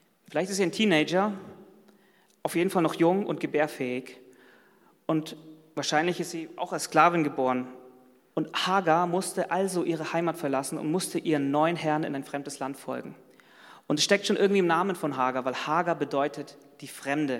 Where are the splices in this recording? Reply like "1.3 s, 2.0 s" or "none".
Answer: 8.3 s